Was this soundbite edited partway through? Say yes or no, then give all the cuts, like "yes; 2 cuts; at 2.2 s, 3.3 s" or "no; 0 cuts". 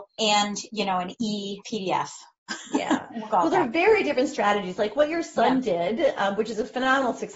yes; 1 cut; at 1.6 s